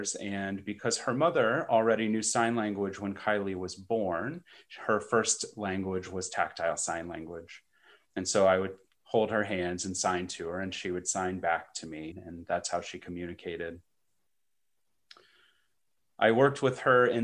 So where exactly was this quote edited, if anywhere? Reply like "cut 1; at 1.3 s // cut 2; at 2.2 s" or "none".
cut 1; at 12.1 s